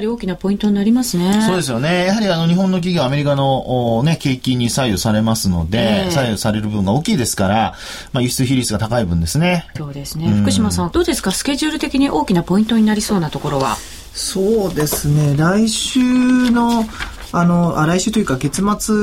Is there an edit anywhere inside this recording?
yes; 2 cuts; at 9.8 s, 10.9 s

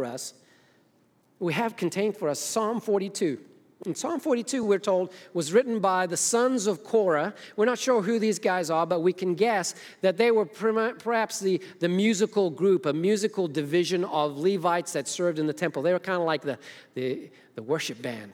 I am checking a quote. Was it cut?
no; 0 cuts

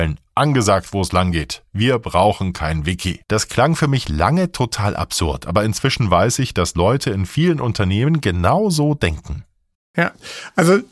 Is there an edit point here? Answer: yes; 2 cuts; at 3.2 s, 9.7 s

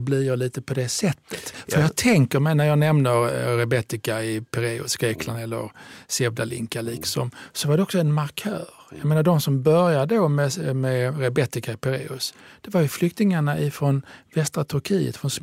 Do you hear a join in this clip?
no; 0 cuts

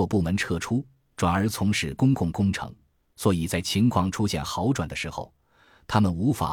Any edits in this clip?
no; 0 cuts

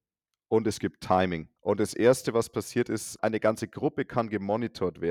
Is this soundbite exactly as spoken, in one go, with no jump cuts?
no; 2 cuts; at 1.6 s, 3.2 s

